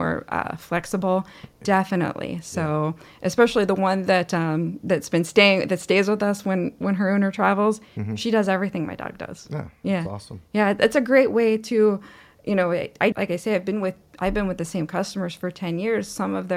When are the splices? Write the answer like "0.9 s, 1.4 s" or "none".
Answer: 13.1 s